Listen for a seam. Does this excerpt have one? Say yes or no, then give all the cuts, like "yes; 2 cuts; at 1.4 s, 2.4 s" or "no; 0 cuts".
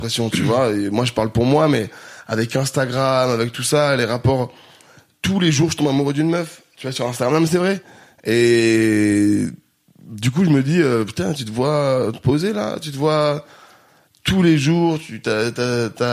no; 0 cuts